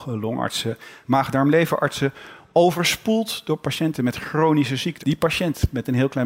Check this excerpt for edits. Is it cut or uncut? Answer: cut